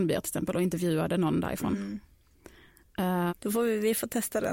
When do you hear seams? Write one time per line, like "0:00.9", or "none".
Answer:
0:03.3